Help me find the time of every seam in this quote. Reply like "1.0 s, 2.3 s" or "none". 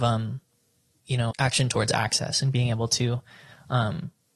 1.3 s